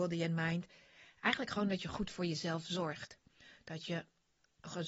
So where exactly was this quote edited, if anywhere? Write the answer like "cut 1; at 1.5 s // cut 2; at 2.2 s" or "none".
none